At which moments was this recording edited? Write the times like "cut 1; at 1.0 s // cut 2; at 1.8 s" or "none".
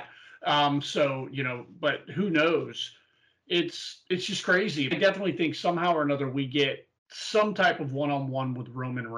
cut 1; at 4.9 s // cut 2; at 7.0 s